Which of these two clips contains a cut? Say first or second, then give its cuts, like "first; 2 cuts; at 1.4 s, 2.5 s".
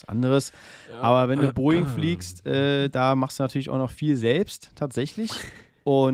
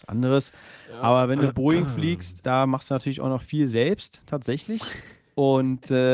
second; 1 cut; at 2.4 s